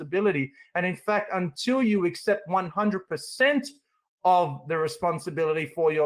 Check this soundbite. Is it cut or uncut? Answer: uncut